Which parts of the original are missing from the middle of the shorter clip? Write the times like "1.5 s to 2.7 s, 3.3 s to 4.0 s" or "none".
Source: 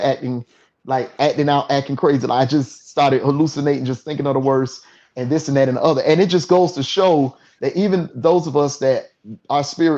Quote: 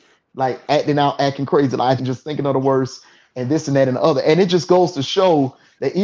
2.5 s to 3.8 s